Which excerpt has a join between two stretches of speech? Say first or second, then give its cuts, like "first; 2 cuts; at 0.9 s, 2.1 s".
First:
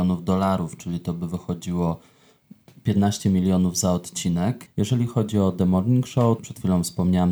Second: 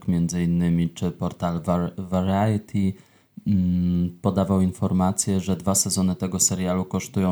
first; 2 cuts; at 4.7 s, 6.4 s